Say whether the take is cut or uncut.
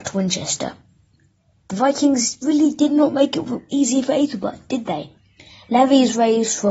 uncut